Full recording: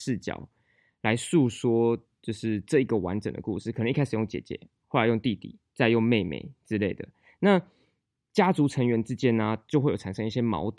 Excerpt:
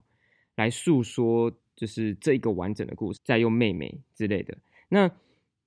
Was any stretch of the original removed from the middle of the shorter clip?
yes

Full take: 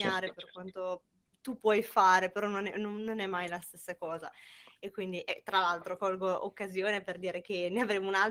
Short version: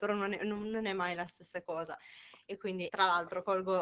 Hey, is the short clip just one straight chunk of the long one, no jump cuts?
no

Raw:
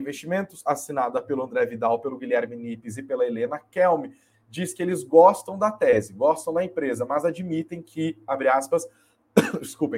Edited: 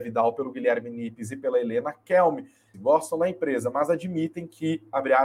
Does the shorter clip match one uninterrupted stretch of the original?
no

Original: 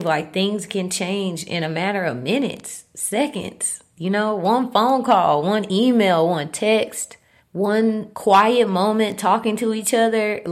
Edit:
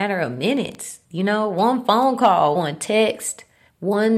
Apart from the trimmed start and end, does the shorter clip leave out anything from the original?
yes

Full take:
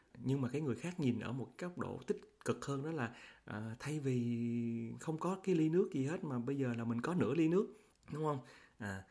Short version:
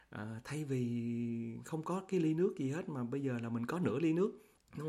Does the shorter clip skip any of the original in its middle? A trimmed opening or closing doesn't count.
no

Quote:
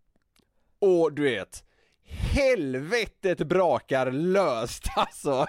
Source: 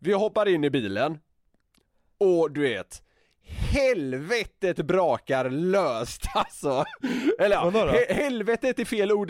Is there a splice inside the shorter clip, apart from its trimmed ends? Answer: no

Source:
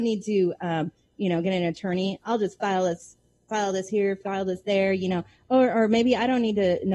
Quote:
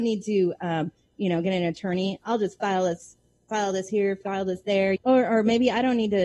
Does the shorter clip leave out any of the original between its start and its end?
yes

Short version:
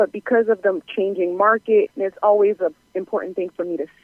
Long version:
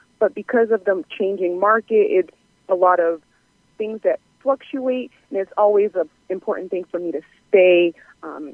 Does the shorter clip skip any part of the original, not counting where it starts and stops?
yes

